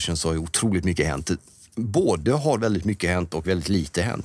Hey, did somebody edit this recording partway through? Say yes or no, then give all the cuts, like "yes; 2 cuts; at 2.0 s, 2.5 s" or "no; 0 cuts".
no; 0 cuts